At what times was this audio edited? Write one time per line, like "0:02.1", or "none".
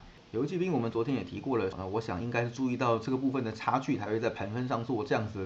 0:01.7